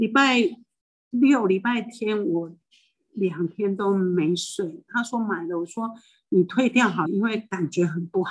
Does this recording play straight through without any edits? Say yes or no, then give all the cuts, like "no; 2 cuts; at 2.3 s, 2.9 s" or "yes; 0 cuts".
no; 2 cuts; at 4.9 s, 7.0 s